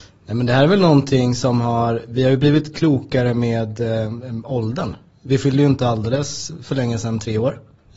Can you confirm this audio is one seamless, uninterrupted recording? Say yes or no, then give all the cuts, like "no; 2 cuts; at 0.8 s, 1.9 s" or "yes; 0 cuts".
yes; 0 cuts